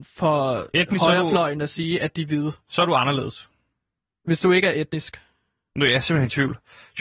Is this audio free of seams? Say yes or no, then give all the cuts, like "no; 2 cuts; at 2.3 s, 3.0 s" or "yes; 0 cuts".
yes; 0 cuts